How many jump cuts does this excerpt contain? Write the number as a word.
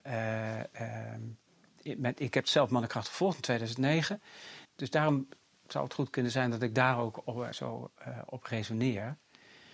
two